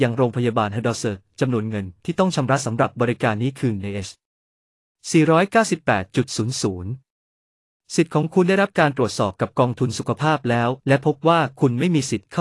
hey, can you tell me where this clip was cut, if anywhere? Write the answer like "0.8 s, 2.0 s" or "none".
10.8 s